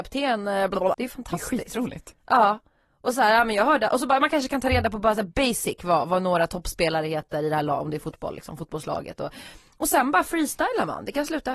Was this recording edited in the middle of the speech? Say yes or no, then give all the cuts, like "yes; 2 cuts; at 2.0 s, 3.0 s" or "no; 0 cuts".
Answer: yes; 1 cut; at 0.9 s